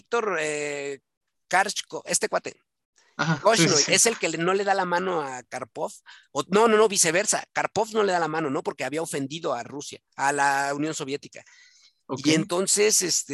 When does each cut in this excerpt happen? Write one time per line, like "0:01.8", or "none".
none